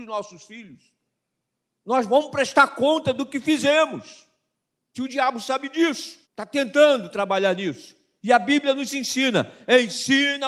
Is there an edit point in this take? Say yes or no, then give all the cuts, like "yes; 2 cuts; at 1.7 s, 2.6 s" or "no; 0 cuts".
yes; 2 cuts; at 4.9 s, 6.2 s